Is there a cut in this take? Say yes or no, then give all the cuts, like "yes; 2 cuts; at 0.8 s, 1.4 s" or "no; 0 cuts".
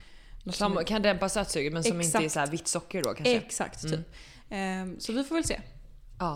no; 0 cuts